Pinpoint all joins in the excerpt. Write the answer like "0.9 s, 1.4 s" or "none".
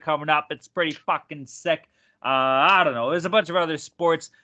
none